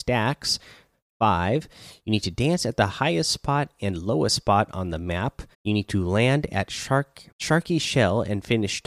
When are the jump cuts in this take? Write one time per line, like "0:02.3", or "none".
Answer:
0:05.5
0:07.3